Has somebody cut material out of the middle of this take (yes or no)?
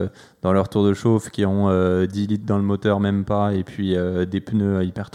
no